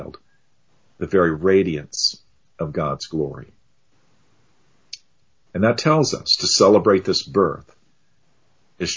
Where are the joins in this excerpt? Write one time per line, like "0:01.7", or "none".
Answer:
none